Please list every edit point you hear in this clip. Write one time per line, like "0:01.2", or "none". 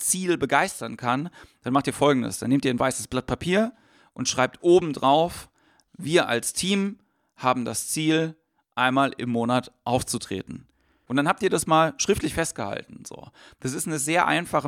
0:11.1